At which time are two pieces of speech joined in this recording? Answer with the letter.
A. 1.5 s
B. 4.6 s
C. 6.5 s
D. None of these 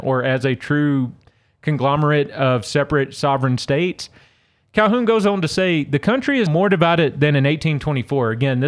C